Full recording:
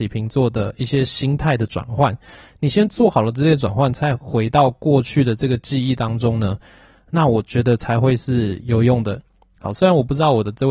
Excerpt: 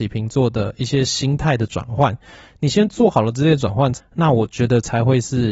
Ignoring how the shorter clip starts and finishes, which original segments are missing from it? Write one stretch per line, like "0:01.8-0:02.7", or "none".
0:03.9-0:06.9